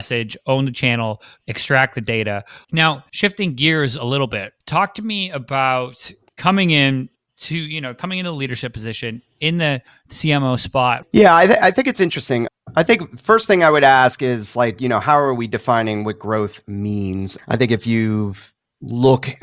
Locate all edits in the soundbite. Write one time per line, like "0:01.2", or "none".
0:02.6
0:11.0